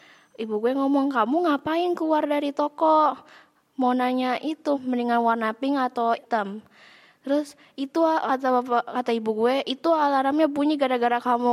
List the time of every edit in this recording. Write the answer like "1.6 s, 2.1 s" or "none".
4.8 s